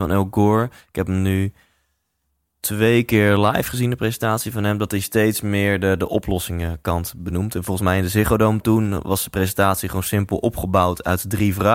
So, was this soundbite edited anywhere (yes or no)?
no